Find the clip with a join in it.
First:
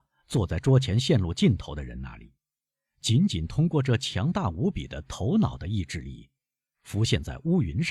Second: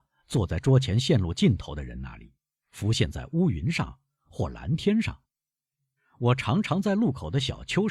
second; 2 cuts; at 2.6 s, 6.0 s

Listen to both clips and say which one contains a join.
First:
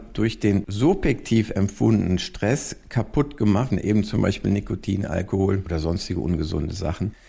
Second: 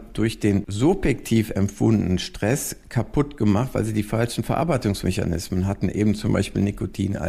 first; 1 cut; at 3.7 s

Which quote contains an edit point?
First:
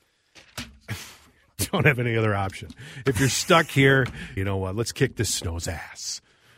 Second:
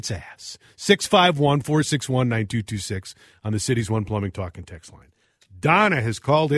first; 1 cut; at 4.4 s

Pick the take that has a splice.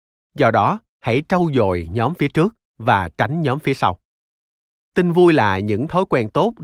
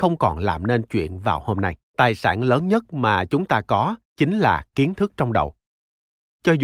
second; 1 cut; at 1.8 s

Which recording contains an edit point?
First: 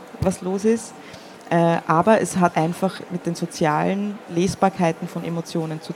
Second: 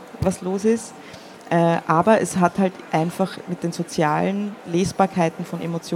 first; 1 cut; at 2.5 s

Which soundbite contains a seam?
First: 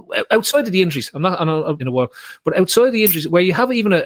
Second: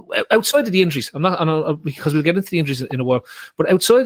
first; 1 cut; at 1.8 s

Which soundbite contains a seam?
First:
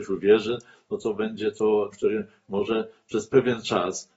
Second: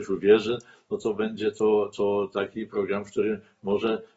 first; 1 cut; at 1.9 s

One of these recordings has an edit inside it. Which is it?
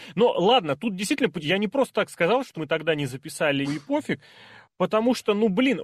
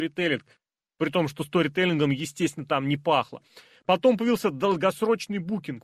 first; 2 cuts; at 2.5 s, 3.6 s

